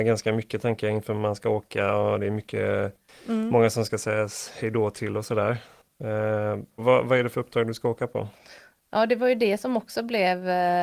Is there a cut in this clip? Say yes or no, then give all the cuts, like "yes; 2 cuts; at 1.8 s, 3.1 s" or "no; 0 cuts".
yes; 1 cut; at 6.8 s